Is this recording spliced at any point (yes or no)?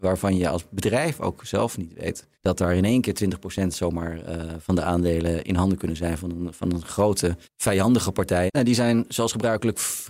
yes